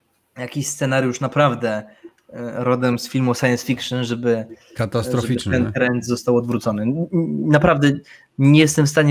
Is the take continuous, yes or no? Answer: yes